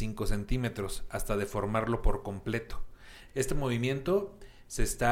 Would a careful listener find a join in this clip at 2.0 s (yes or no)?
no